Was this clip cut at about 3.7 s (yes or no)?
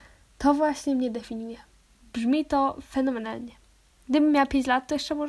no